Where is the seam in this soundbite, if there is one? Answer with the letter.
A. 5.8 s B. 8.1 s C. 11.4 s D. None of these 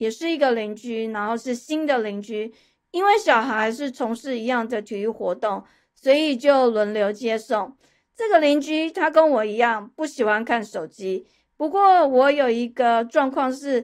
D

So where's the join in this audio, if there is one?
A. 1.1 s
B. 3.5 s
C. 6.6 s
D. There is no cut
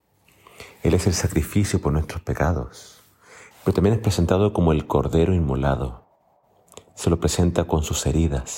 B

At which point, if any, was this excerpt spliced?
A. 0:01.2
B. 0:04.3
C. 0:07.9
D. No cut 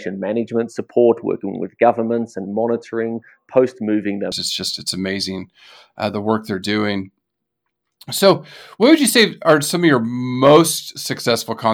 B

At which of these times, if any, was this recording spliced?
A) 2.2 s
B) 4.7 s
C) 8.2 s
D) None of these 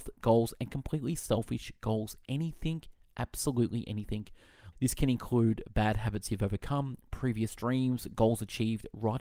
B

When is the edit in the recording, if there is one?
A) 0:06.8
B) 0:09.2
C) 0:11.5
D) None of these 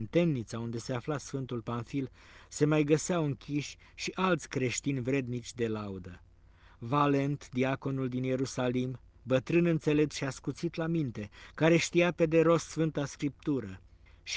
D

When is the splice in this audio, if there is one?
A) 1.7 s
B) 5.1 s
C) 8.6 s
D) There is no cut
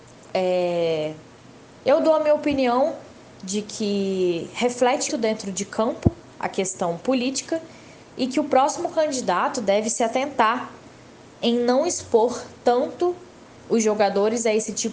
B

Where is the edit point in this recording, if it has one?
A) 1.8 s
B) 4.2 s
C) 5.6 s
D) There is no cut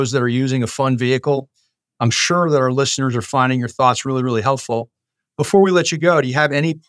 A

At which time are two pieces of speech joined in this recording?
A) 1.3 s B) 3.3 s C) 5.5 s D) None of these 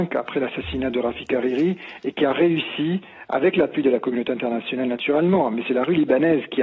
D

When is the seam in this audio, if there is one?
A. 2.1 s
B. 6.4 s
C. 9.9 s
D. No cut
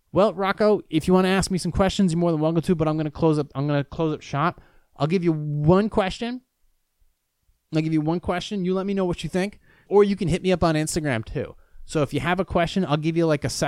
C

